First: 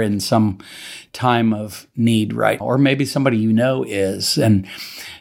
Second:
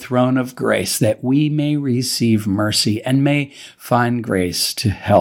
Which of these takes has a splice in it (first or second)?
first